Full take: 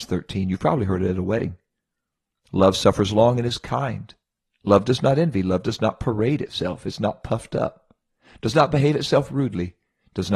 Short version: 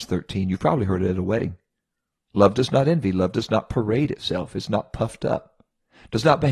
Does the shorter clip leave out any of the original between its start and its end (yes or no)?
yes